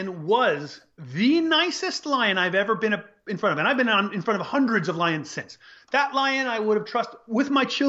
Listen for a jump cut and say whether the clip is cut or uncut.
uncut